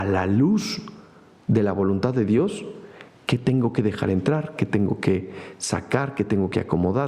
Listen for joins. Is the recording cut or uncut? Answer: uncut